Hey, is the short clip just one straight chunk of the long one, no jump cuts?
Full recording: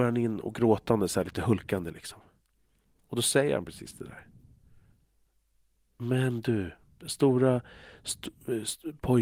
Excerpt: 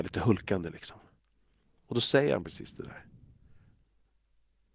yes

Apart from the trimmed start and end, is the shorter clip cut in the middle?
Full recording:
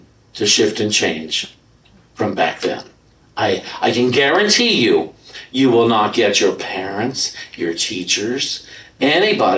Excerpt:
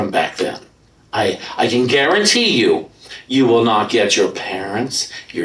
no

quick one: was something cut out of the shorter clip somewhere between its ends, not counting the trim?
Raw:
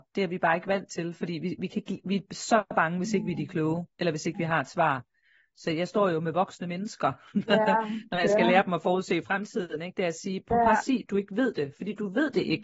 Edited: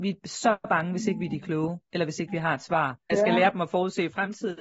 yes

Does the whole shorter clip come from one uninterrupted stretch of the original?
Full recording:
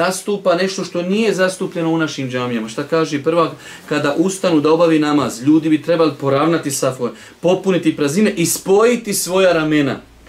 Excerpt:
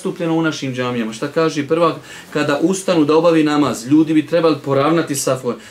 yes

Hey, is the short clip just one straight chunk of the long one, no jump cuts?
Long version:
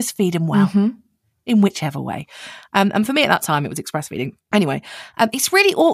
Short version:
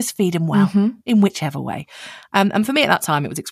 no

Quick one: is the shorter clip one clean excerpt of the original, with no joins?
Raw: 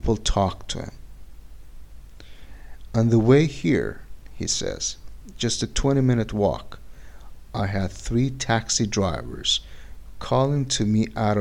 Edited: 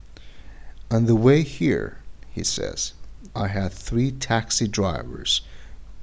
no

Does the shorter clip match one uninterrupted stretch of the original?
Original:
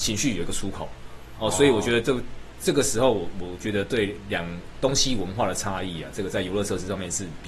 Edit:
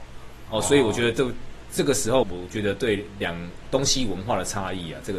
no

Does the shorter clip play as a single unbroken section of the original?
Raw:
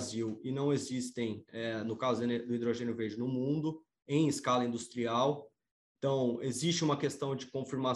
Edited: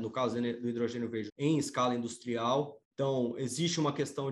no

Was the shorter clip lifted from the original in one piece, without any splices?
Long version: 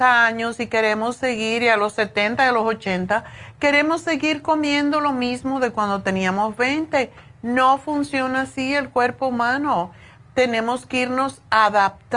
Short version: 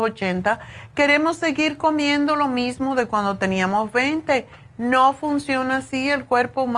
yes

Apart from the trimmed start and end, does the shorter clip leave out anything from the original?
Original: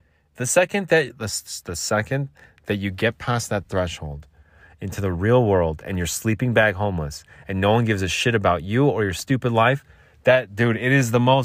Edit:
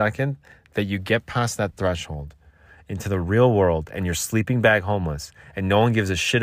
no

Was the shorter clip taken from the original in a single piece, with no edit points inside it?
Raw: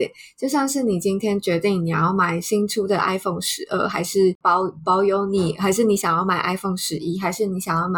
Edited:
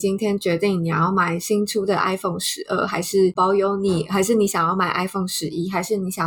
no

